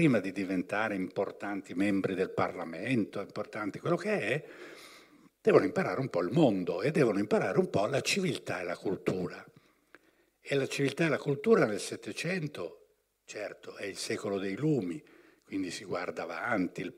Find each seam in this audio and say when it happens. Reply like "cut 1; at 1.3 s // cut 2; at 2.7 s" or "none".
none